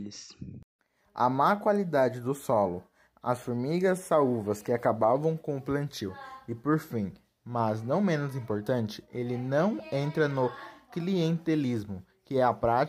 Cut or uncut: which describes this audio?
uncut